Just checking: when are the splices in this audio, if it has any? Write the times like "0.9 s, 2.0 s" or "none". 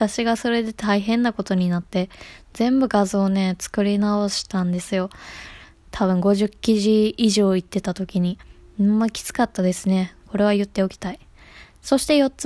none